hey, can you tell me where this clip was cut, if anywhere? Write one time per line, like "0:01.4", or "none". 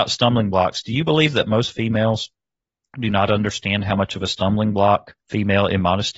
0:05.2